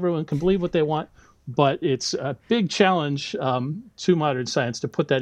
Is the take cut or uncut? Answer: uncut